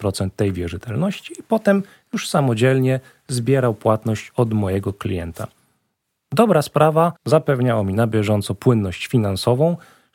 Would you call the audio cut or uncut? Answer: cut